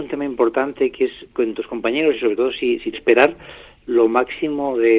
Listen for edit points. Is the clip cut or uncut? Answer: cut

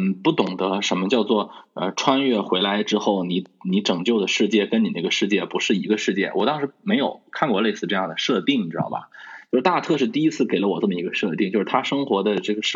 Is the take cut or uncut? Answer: uncut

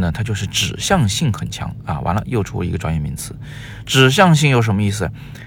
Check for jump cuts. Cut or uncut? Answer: uncut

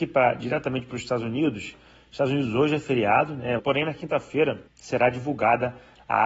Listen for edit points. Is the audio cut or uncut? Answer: cut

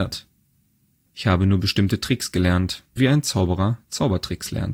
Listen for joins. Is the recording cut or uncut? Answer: cut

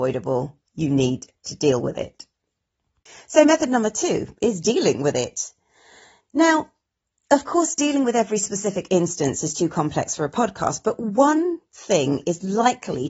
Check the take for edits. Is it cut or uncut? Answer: uncut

